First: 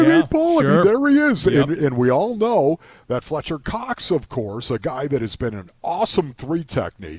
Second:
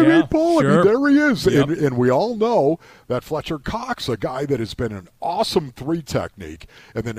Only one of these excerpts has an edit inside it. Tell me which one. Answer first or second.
second